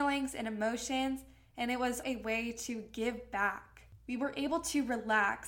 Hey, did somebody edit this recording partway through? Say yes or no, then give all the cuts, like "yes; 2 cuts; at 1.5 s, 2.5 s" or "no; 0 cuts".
yes; 2 cuts; at 2.0 s, 4.0 s